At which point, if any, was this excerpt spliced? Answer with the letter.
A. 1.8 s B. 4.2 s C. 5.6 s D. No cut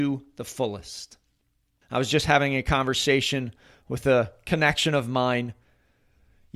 A